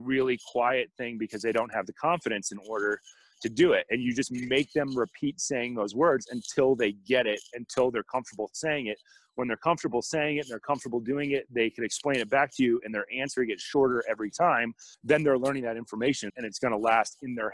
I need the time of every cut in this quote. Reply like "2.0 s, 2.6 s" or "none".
14.9 s, 16.3 s